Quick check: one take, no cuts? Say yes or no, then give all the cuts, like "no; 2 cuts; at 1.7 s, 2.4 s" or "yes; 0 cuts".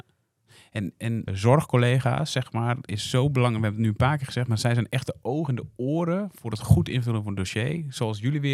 no; 1 cut; at 1.3 s